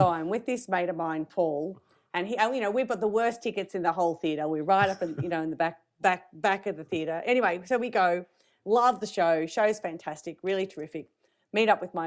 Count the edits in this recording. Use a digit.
0